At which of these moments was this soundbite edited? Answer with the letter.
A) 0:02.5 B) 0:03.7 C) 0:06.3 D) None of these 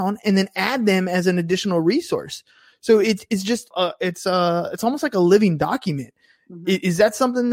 B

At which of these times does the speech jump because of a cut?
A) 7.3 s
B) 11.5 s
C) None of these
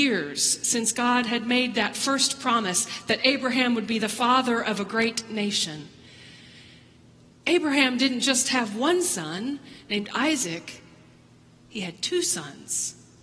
A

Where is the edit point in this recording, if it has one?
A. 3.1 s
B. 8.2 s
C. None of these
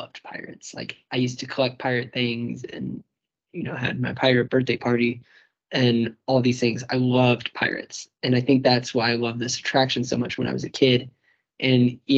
C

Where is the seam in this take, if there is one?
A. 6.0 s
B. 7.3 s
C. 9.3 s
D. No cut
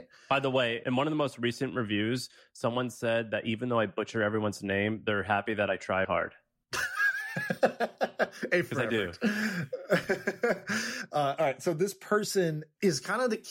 A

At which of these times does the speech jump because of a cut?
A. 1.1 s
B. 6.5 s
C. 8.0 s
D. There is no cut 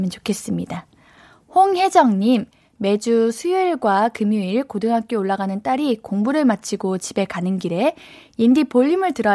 D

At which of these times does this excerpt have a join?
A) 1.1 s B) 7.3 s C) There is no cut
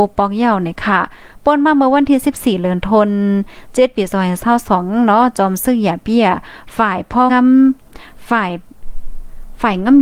B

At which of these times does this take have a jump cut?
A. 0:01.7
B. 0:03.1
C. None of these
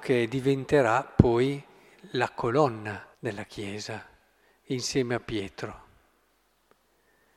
B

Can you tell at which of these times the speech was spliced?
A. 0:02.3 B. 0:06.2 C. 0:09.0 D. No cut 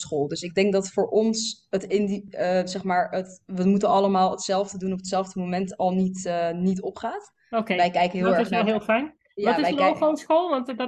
D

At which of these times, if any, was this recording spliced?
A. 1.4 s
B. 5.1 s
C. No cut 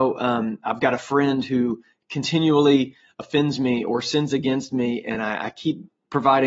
C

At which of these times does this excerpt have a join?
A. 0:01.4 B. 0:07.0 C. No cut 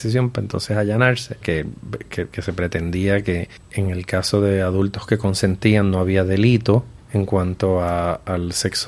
A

